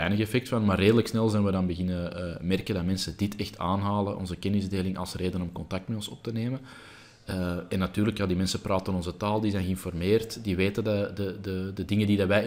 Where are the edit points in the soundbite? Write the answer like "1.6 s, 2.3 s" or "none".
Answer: none